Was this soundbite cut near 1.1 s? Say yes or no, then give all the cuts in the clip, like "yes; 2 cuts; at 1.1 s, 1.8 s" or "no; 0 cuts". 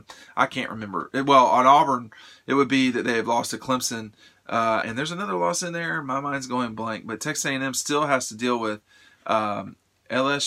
no; 1 cut; at 4.8 s